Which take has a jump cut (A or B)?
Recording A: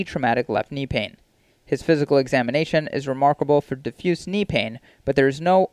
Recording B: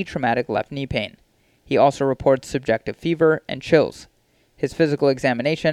A